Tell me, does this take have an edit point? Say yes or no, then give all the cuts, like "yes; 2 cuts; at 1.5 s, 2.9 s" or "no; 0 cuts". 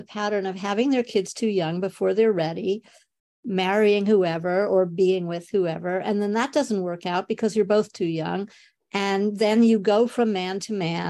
no; 0 cuts